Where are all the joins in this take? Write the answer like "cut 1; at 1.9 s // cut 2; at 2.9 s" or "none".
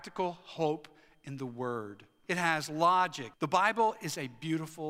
cut 1; at 2.2 s // cut 2; at 3.3 s